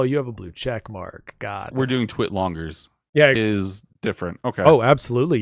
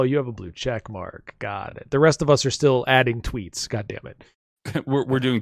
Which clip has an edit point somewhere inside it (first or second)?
first